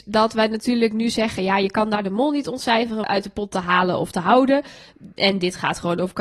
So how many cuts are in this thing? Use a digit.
1